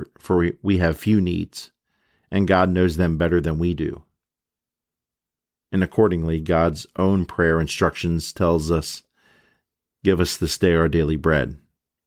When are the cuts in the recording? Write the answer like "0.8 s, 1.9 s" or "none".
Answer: none